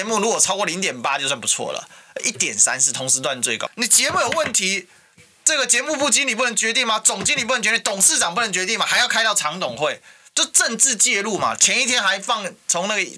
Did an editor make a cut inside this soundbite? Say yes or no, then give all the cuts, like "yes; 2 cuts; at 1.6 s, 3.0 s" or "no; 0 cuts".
yes; 1 cut; at 3.7 s